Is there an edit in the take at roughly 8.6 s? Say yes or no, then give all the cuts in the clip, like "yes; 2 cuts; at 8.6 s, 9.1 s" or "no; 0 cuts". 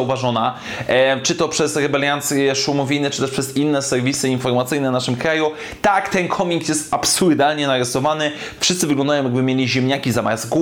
yes; 1 cut; at 8.6 s